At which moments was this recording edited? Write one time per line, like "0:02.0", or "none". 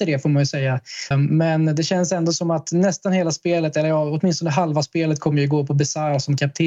0:01.1